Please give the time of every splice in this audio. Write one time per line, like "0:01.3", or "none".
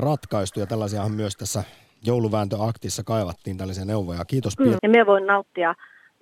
0:04.8

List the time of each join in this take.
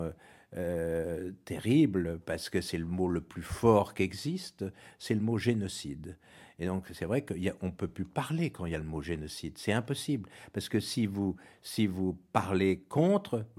none

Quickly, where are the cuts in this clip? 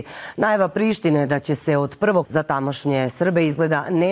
0:02.2

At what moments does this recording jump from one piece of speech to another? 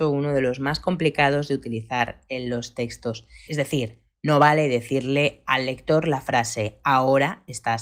0:03.5

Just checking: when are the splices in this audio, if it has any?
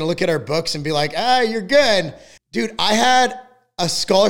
0:02.4

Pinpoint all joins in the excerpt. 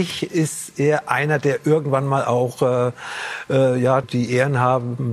0:04.0

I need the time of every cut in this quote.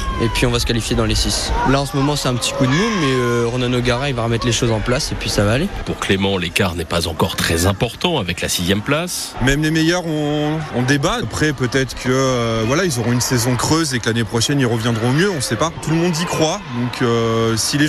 0:09.3
0:11.2

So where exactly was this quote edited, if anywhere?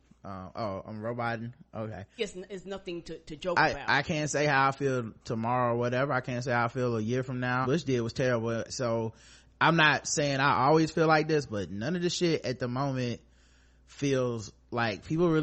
0:02.2
0:07.6
0:08.7

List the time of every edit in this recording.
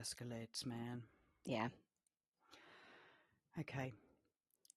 none

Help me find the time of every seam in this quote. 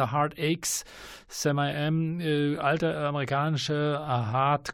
none

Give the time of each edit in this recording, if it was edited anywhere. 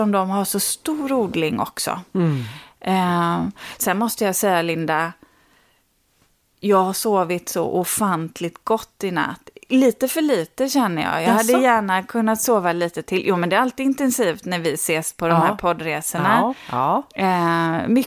none

